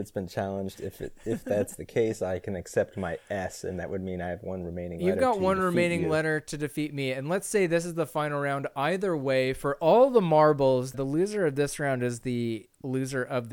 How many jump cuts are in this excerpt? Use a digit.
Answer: 1